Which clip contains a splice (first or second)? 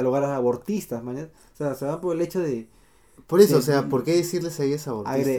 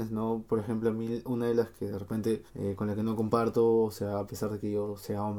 second